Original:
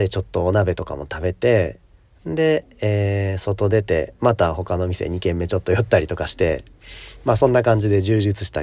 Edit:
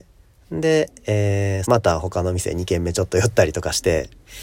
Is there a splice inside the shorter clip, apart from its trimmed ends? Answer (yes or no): yes